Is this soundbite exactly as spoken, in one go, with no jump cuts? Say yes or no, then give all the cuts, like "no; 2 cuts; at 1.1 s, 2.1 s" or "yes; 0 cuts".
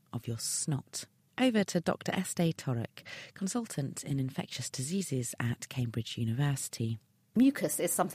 yes; 0 cuts